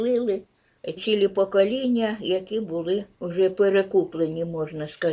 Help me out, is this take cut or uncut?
cut